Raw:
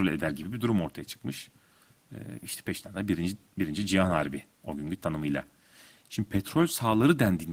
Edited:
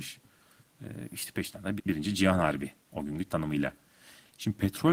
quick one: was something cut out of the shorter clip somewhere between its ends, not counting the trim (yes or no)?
yes